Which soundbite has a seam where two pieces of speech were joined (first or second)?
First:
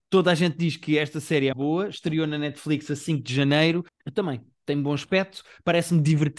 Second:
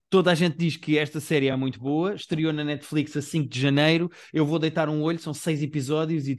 first